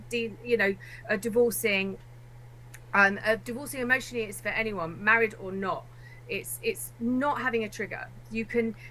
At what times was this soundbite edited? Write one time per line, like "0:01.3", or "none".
none